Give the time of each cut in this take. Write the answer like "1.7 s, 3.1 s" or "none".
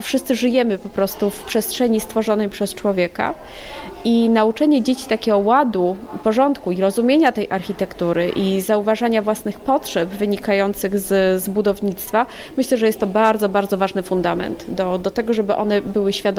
none